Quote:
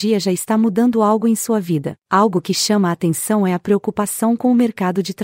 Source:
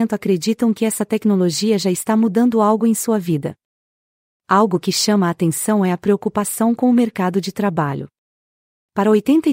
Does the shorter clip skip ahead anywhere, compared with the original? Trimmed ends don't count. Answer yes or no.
yes